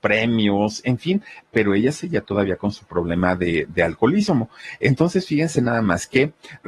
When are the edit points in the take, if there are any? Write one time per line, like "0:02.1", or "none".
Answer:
0:01.4